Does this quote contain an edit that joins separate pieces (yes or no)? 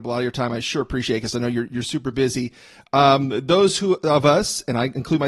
no